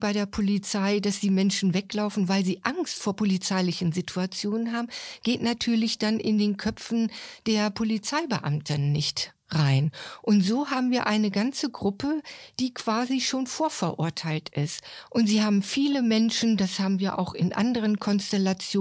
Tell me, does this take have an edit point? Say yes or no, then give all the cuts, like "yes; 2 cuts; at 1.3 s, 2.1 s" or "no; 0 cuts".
no; 0 cuts